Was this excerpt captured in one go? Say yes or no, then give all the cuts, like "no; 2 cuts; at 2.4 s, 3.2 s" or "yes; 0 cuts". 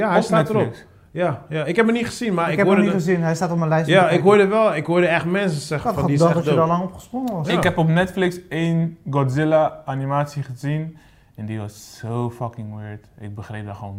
yes; 0 cuts